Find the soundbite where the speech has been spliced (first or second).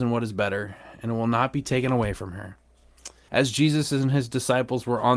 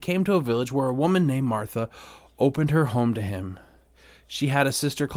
first